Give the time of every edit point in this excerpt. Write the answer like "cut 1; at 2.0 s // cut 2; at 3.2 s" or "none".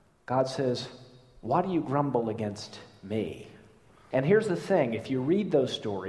cut 1; at 4.1 s